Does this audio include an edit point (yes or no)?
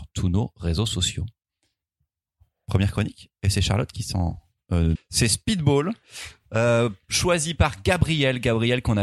yes